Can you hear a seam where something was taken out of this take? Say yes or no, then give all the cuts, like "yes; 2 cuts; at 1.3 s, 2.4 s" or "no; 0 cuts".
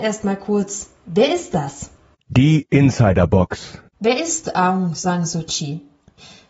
no; 0 cuts